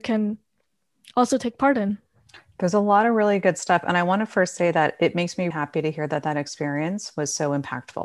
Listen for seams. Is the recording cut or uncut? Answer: cut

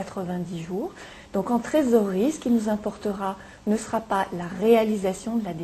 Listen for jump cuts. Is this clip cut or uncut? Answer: uncut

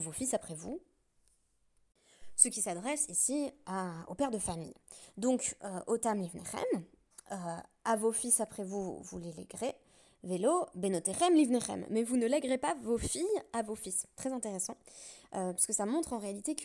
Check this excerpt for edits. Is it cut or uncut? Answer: uncut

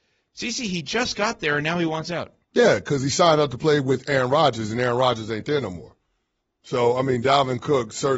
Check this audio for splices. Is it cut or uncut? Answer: cut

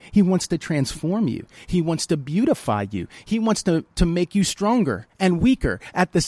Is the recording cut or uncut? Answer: uncut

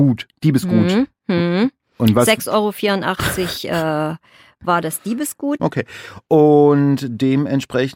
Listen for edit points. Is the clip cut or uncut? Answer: cut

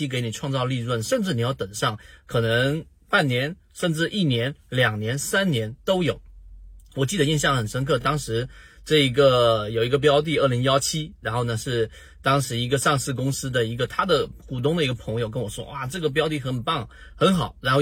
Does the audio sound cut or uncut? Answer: uncut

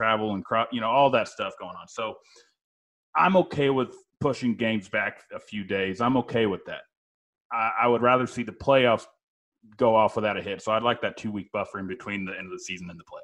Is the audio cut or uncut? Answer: uncut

